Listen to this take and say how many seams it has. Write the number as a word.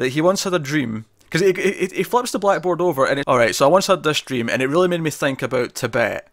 one